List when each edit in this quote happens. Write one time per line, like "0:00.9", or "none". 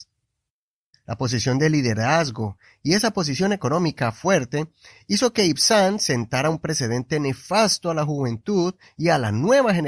0:00.9

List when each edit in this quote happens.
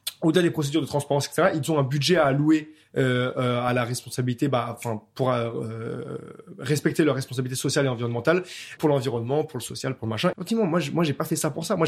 0:08.8
0:10.3

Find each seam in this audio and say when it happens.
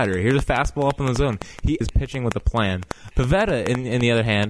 0:01.8
0:03.1

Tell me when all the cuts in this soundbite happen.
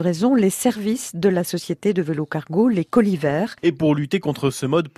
0:03.6

